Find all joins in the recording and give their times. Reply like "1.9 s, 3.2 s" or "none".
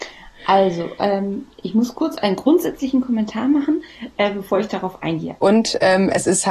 5.4 s